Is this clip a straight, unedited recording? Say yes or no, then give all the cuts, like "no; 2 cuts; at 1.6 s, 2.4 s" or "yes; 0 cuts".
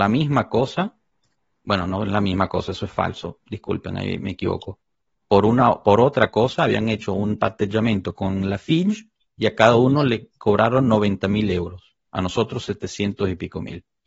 no; 1 cut; at 12.1 s